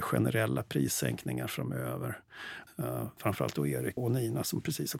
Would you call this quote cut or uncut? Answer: cut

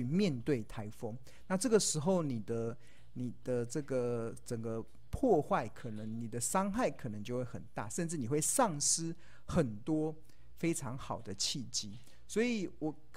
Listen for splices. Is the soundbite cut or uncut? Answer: uncut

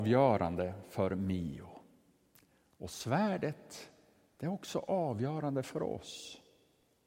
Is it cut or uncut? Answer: uncut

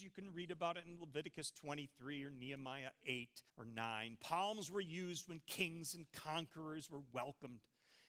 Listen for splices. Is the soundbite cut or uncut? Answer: cut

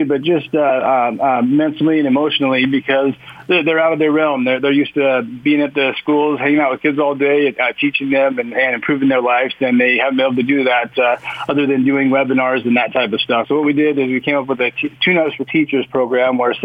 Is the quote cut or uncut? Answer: cut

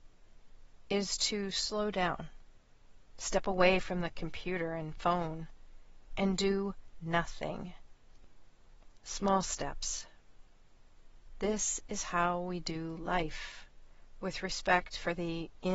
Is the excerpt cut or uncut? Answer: cut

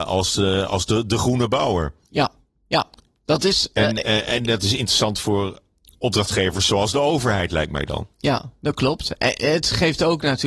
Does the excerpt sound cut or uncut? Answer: uncut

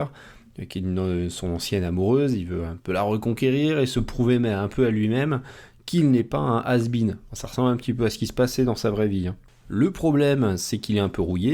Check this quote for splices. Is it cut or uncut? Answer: uncut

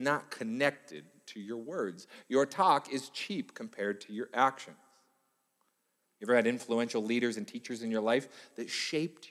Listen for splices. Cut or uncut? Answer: cut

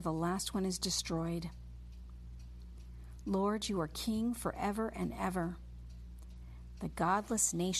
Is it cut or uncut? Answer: uncut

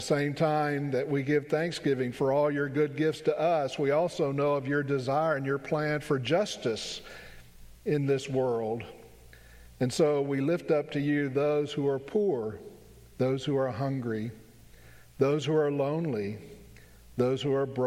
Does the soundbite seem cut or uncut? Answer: uncut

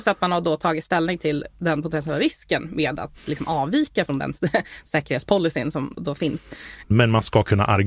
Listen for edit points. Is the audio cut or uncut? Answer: cut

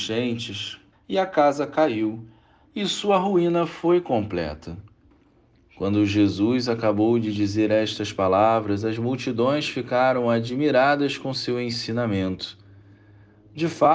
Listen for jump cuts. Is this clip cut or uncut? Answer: cut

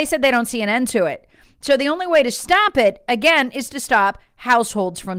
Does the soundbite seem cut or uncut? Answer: uncut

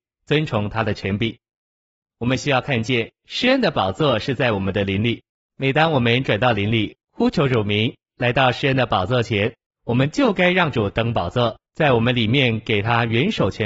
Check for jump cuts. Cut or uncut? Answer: cut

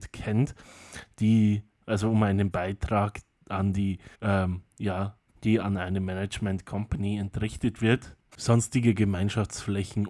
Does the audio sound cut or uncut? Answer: cut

